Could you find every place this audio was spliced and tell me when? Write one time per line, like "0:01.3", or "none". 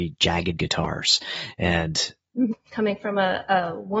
0:02.5